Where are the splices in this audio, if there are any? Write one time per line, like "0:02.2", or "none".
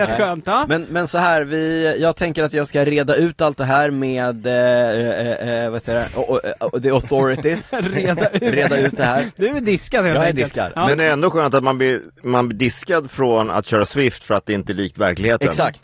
none